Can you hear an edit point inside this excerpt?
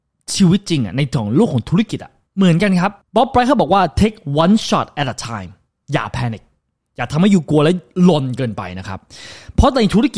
no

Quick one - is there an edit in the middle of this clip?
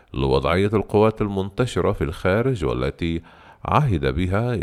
no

